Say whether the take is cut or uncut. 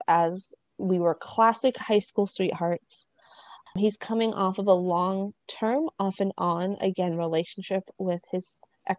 cut